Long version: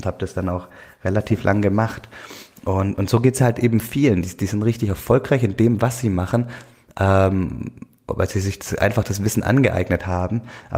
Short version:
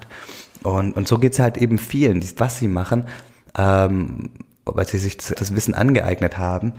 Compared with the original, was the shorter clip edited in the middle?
yes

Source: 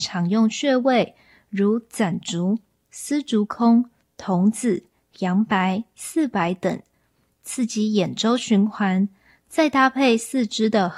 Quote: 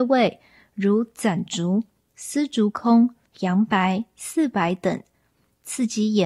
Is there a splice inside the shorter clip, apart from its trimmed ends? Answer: yes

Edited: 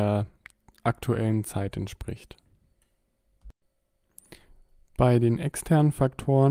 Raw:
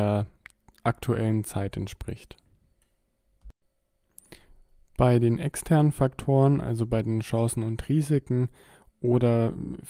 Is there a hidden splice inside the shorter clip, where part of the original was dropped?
no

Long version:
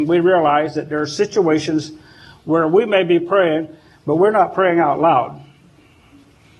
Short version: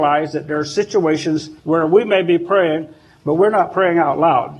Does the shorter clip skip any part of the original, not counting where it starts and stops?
yes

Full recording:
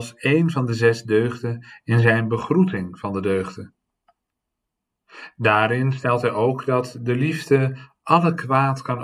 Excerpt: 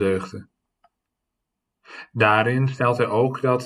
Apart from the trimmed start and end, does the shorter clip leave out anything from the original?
no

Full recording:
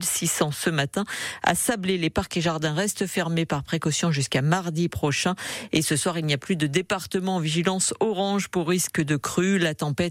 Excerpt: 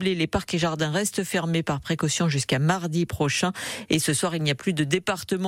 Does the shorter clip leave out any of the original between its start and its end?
no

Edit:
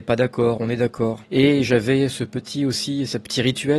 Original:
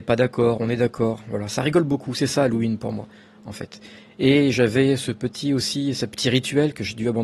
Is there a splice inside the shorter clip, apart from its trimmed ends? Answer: yes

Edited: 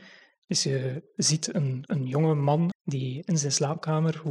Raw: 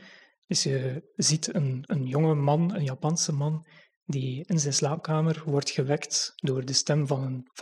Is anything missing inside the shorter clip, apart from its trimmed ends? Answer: yes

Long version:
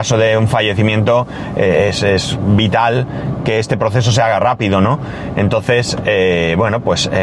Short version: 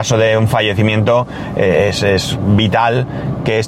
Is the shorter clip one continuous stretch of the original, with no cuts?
yes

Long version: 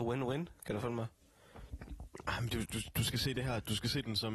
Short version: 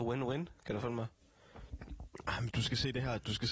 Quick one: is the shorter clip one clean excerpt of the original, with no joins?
no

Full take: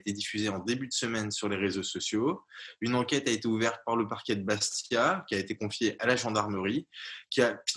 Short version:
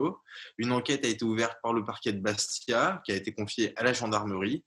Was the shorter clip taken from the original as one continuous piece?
yes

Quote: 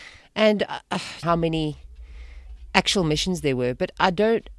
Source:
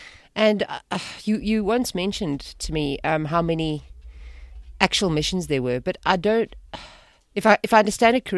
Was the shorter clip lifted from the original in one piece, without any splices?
no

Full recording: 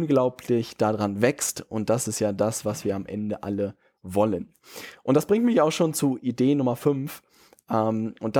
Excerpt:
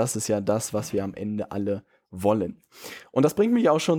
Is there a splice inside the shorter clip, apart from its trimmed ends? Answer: no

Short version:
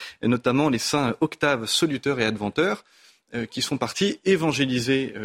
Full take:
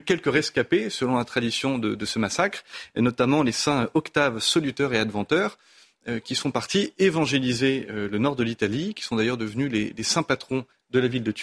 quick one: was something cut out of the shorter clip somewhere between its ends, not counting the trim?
no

